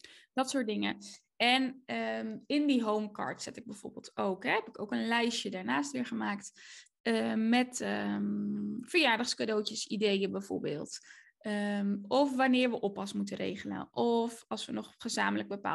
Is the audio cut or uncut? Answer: uncut